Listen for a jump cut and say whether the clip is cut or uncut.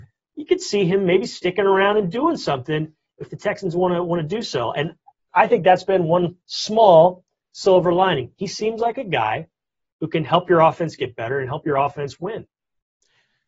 uncut